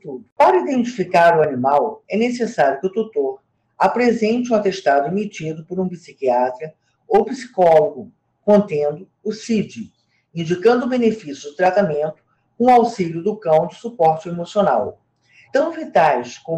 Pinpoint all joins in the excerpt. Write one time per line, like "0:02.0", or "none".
0:15.5